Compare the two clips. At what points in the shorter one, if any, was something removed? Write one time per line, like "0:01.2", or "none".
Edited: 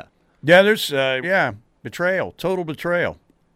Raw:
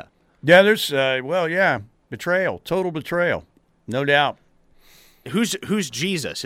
0:01.2